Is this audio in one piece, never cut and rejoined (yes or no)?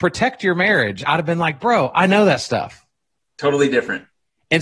yes